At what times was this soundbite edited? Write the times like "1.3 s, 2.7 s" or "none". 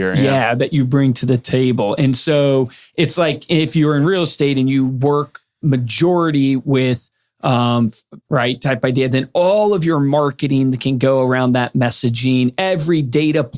8.2 s